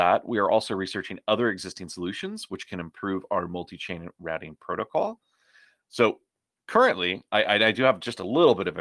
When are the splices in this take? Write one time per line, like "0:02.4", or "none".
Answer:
0:05.8
0:07.3